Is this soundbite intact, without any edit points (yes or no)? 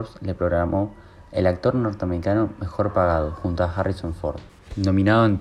yes